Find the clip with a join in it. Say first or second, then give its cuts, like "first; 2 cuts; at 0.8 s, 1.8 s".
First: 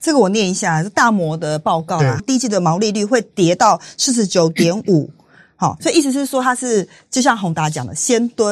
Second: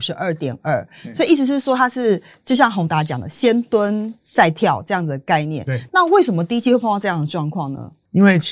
first; 2 cuts; at 2.2 s, 5.8 s